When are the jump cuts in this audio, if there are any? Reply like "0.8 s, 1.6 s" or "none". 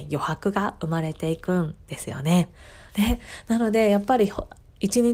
2.9 s